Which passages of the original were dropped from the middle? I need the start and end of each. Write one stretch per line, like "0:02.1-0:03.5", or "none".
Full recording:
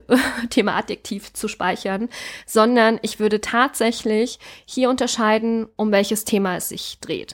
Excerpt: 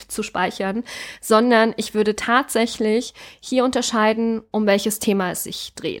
none